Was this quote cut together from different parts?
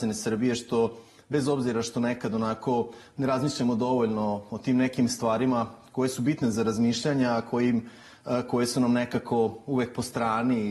no; 0 cuts

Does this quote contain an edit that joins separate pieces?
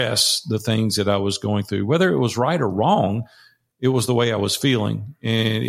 no; 0 cuts

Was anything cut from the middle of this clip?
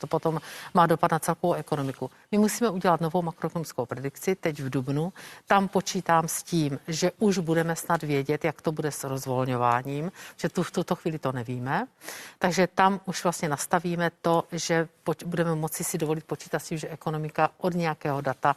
no; 0 cuts

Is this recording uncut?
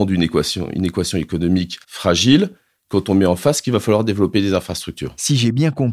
no; 1 cut; at 1.8 s

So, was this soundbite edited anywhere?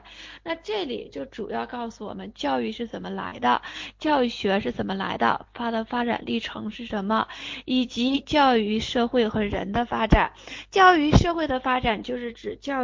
no; 0 cuts

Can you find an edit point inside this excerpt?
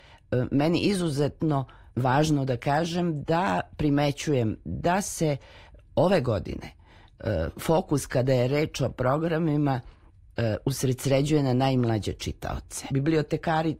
yes; 2 cuts; at 1.9 s, 12.9 s

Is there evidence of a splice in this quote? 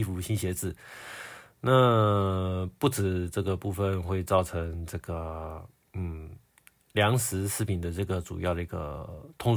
no; 0 cuts

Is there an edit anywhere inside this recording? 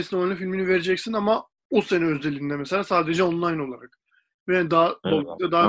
no; 0 cuts

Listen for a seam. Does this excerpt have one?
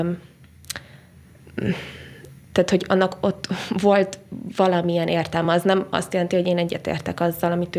no; 0 cuts

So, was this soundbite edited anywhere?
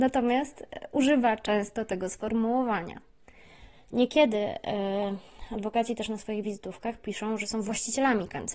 no; 0 cuts

